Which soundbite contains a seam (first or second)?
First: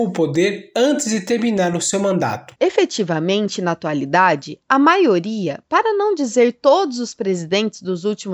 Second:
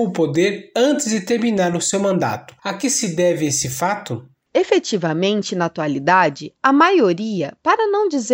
first